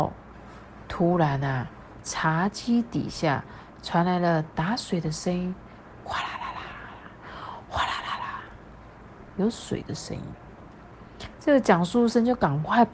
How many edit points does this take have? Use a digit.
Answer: 2